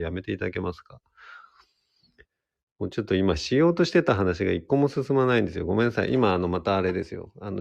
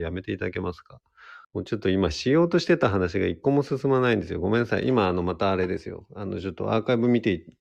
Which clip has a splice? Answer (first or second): second